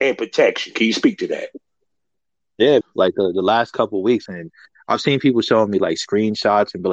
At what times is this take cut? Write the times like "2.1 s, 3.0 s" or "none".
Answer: 2.8 s, 4.3 s